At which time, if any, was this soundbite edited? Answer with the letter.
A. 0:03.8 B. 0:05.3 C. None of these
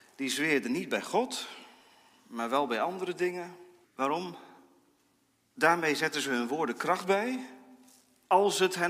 A